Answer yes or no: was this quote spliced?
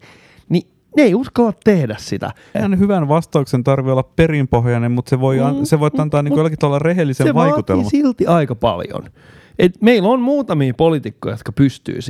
yes